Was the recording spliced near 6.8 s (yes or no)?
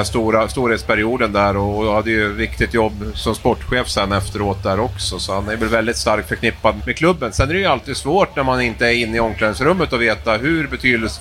yes